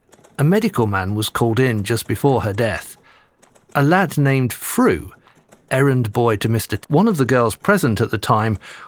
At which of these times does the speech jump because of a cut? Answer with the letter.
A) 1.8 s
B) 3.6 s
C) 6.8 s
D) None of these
C